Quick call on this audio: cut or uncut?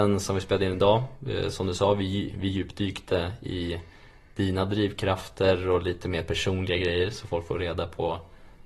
uncut